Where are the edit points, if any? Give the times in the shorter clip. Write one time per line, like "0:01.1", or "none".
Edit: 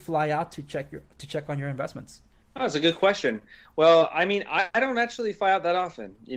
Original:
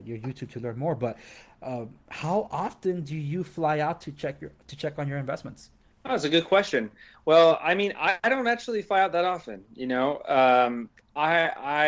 none